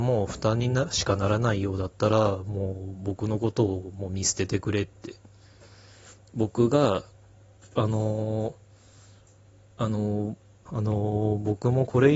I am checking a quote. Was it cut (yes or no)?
yes